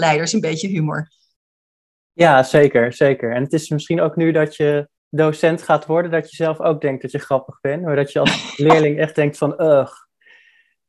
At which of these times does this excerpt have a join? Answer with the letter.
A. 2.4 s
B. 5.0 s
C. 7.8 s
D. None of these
B